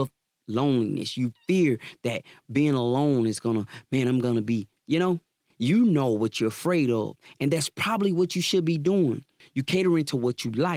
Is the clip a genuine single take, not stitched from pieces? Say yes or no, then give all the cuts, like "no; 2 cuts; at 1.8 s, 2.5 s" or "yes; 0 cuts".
no; 2 cuts; at 5.5 s, 9.4 s